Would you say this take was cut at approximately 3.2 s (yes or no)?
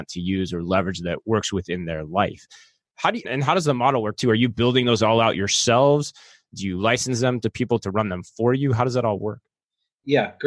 yes